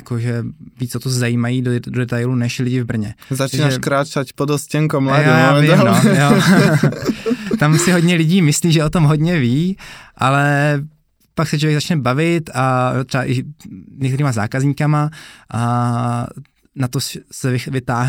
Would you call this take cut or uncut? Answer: uncut